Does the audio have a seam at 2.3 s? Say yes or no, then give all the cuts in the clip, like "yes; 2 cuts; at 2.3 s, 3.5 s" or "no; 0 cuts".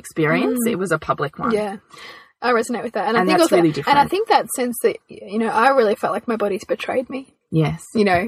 no; 0 cuts